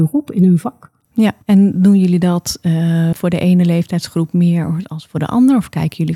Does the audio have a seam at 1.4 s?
yes; 2 cuts; at 1.4 s, 3.1 s

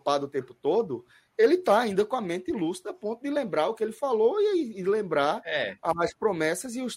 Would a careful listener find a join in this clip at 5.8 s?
no; 0 cuts

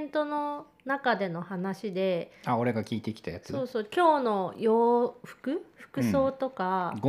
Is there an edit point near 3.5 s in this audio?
no; 0 cuts

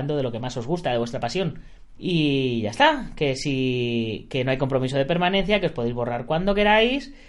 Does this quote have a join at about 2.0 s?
yes; 1 cut; at 2.0 s

